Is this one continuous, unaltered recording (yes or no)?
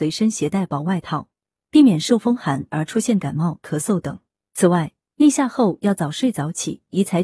yes